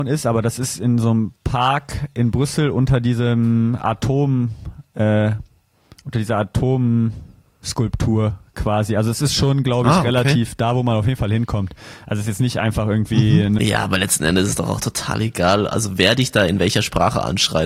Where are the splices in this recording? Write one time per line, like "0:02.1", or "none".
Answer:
0:13.6